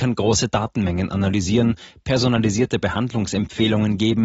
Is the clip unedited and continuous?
yes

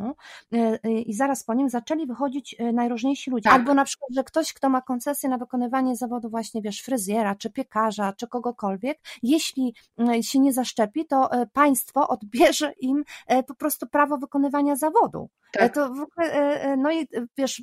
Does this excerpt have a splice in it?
yes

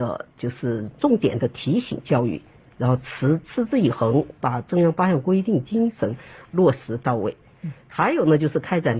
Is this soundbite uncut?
yes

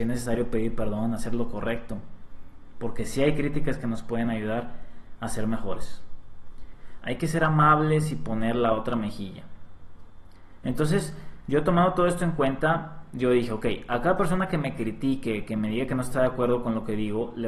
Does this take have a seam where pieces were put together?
yes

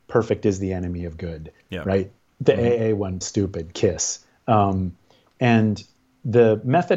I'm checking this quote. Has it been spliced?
yes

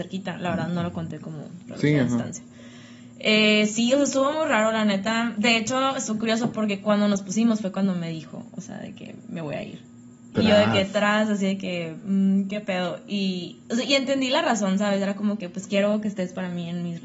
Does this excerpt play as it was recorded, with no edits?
yes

